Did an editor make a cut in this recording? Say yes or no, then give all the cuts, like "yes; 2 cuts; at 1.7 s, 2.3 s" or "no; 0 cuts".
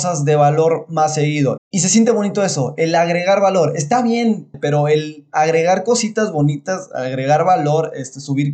yes; 2 cuts; at 1.6 s, 4.5 s